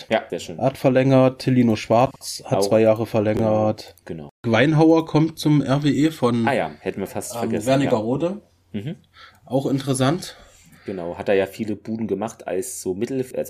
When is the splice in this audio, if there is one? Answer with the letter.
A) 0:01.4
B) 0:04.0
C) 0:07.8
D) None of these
B